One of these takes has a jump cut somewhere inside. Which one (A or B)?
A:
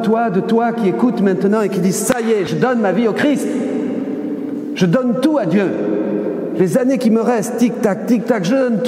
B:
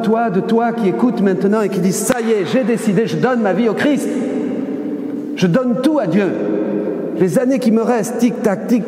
A